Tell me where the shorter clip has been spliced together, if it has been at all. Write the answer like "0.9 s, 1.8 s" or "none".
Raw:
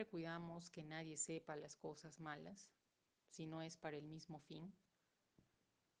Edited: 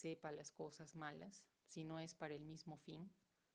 1.5 s